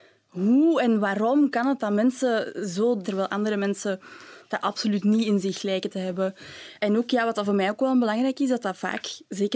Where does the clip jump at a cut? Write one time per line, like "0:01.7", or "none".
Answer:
0:03.0